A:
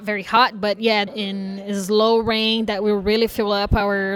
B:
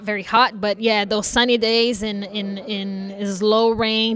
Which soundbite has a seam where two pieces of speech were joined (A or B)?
A